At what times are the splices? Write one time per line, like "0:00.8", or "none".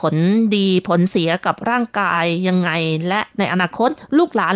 none